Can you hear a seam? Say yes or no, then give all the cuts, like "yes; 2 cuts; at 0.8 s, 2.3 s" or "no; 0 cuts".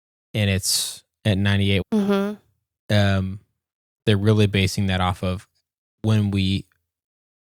yes; 1 cut; at 1.8 s